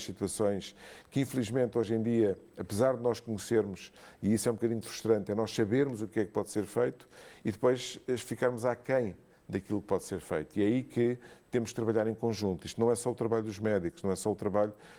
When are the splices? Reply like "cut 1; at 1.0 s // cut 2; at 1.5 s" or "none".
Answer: none

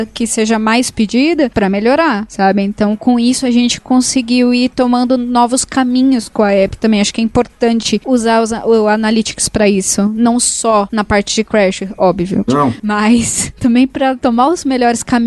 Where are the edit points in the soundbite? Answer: cut 1; at 12.5 s

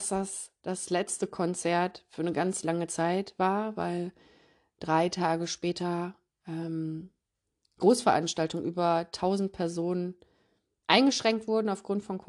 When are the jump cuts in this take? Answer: none

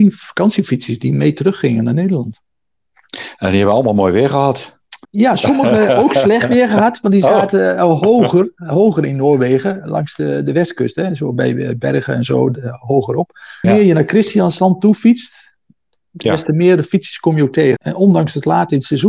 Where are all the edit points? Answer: cut 1; at 5.0 s // cut 2; at 13.6 s // cut 3; at 17.8 s

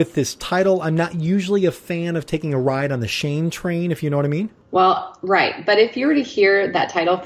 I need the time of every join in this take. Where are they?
none

